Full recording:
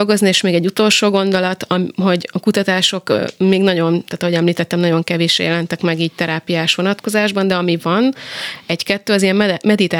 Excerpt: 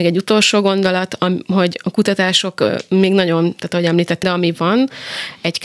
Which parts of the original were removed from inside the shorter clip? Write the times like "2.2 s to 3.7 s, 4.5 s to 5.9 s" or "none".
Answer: 4.7 s to 7.5 s